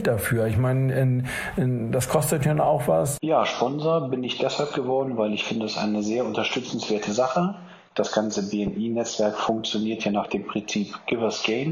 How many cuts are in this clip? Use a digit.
1